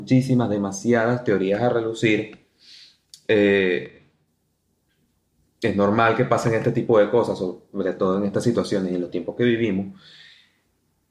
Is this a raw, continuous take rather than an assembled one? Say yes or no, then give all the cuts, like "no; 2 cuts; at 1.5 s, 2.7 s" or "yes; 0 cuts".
yes; 0 cuts